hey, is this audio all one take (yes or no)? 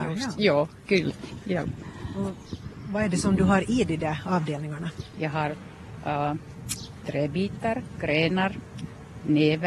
yes